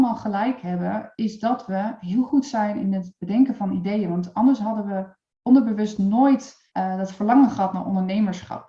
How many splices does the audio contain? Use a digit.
1